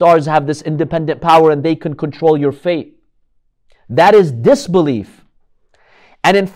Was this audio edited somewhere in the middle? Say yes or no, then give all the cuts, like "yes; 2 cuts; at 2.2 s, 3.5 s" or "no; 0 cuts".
no; 0 cuts